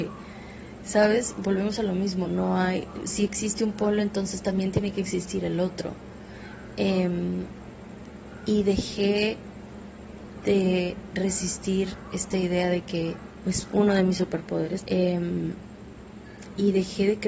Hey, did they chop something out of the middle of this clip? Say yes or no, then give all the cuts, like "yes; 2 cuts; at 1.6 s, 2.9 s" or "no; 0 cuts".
yes; 3 cuts; at 2.2 s, 13.4 s, 14.8 s